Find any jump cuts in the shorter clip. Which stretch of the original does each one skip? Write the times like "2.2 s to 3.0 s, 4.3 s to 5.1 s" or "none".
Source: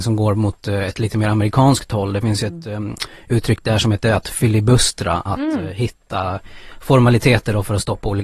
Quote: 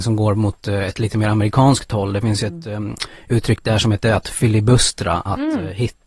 none